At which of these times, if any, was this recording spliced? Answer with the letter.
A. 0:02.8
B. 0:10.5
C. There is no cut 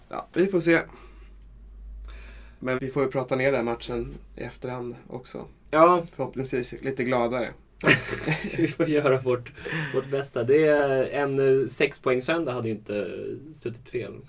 A